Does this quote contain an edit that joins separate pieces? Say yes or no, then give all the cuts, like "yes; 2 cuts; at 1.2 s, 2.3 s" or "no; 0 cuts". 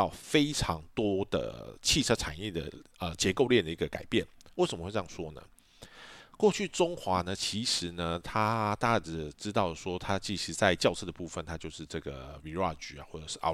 no; 0 cuts